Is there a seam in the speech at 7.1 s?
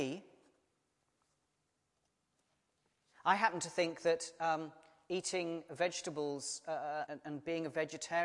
yes; 1 cut; at 7.1 s

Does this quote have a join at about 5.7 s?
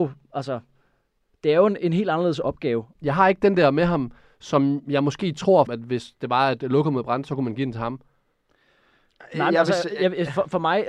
yes; 2 cuts; at 3.0 s, 5.7 s

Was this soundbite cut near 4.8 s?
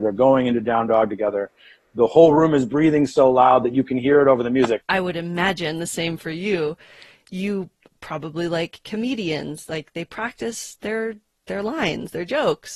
yes; 1 cut; at 4.8 s

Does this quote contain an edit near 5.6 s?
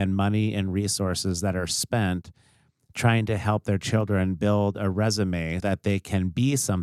yes; 1 cut; at 5.6 s

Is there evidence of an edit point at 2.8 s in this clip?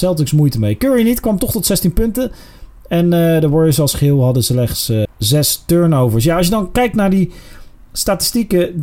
no; 1 cut; at 5.0 s

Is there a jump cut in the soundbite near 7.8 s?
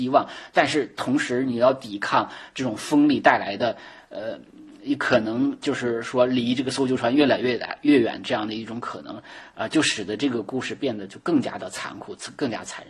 no; 0 cuts

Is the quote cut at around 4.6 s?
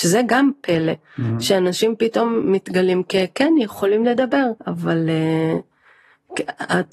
yes; 1 cut; at 4.6 s

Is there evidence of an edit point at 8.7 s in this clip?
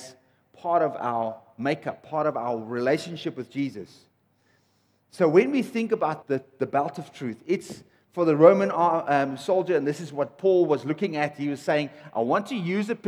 no; 1 cut; at 6.2 s

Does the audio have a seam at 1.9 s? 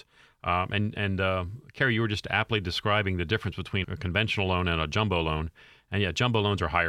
no; 1 cut; at 3.8 s

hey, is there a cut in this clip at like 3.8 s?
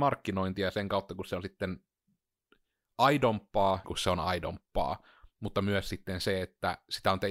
yes; 1 cut; at 3.8 s

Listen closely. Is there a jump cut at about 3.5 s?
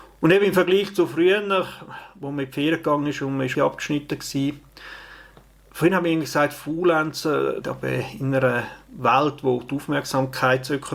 yes; 2 cuts; at 3.5 s, 7.6 s

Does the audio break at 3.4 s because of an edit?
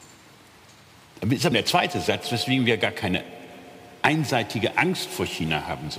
no; 1 cut; at 1.5 s

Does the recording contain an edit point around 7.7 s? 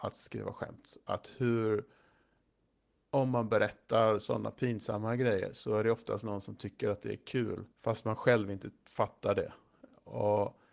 yes; 1 cut; at 7.7 s

